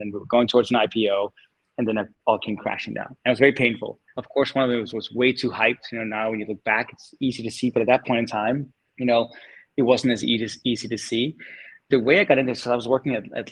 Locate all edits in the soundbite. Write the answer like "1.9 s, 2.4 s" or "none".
4.1 s